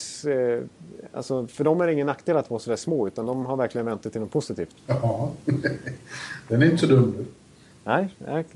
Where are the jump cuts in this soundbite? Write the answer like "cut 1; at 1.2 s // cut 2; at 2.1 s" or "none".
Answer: cut 1; at 4.8 s